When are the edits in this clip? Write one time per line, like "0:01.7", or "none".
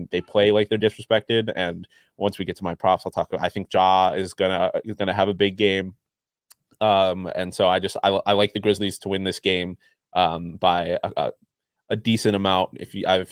none

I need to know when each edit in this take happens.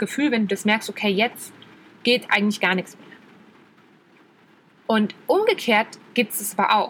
none

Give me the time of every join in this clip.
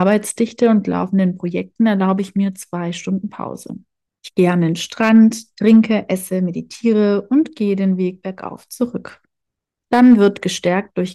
none

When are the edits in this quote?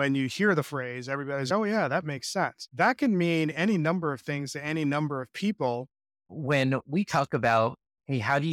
0:02.7
0:06.3

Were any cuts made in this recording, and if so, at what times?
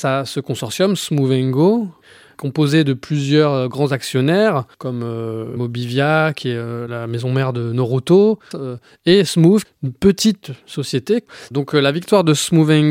0:04.7
0:08.5
0:09.6

